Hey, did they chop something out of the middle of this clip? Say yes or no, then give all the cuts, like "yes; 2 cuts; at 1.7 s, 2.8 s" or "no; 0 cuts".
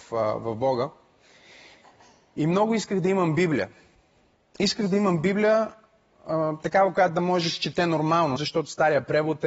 yes; 1 cut; at 8.4 s